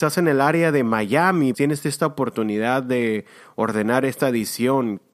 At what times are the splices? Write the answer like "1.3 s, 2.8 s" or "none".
1.5 s